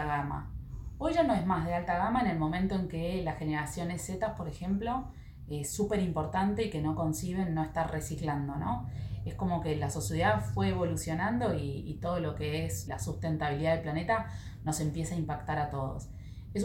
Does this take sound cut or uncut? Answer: cut